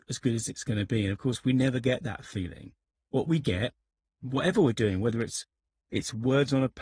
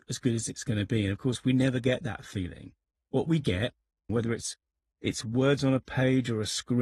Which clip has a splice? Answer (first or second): second